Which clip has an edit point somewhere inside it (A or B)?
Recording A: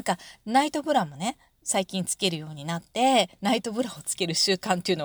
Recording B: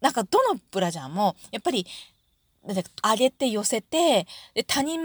B